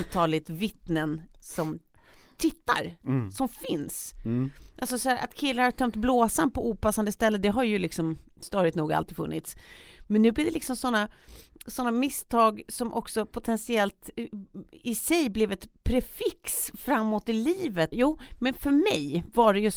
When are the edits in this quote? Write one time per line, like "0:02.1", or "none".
0:17.9